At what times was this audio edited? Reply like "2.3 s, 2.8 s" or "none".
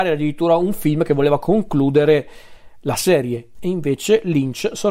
3.5 s